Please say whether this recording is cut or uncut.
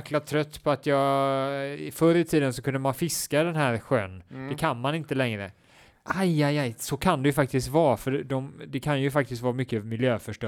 uncut